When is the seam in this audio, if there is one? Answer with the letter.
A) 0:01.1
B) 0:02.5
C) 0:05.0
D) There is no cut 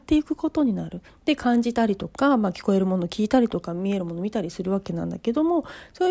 A